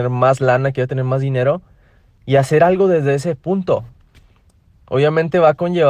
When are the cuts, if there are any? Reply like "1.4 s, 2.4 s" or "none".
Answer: none